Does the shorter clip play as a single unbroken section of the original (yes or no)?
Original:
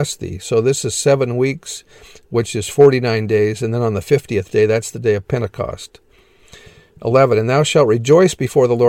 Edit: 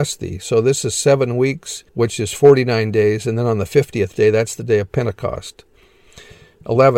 no